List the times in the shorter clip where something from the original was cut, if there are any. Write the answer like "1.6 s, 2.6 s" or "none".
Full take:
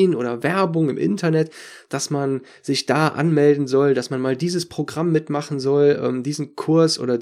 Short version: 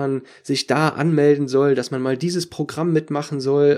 none